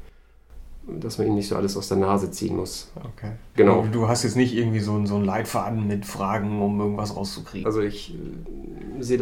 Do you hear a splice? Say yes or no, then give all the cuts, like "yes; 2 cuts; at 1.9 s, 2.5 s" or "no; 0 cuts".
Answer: yes; 2 cuts; at 3.5 s, 7.6 s